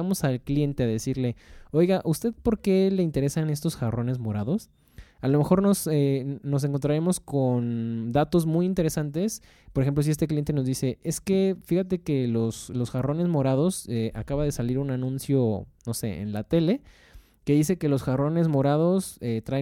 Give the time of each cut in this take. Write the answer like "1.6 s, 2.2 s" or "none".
none